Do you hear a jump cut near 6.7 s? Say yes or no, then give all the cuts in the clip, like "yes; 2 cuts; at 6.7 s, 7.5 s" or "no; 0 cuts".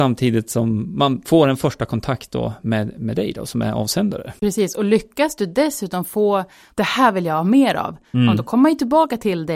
yes; 1 cut; at 6.7 s